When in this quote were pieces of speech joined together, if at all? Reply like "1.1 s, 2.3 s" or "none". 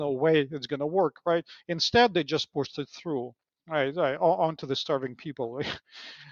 none